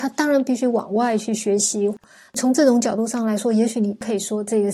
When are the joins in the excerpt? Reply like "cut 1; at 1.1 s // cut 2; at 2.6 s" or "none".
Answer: none